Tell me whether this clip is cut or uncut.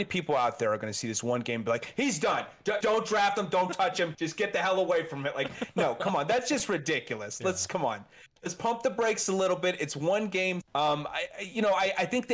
cut